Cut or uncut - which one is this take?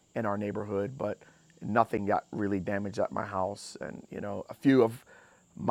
uncut